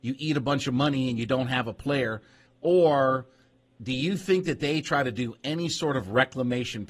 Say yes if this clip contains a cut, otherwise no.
yes